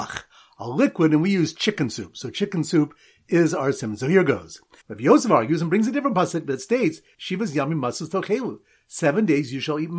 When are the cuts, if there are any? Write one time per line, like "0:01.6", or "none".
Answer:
0:04.8